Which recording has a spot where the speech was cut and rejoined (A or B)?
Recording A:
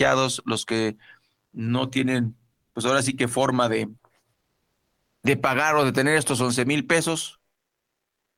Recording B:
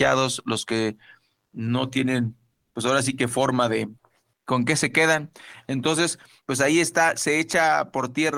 B